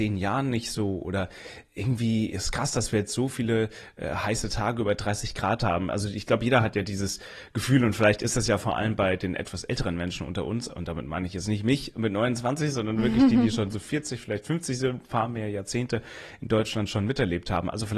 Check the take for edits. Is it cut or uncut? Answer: uncut